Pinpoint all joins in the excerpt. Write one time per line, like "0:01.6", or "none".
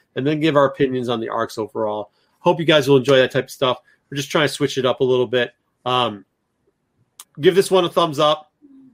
0:07.2